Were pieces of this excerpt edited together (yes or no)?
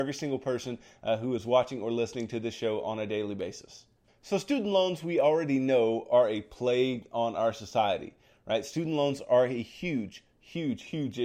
no